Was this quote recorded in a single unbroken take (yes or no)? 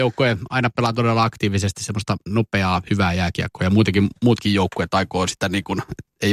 yes